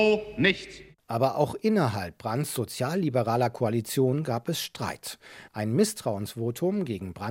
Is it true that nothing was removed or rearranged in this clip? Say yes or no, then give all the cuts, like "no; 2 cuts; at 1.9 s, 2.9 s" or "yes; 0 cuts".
no; 1 cut; at 5.5 s